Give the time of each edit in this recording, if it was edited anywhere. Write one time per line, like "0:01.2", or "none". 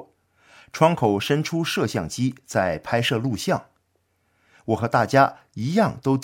none